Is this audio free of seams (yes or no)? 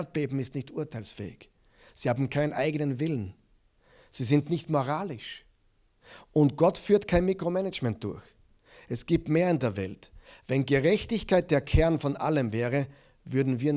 yes